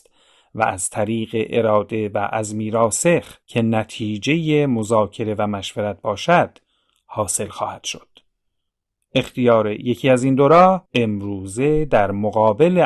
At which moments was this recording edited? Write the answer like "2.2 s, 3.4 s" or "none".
3.4 s, 10.9 s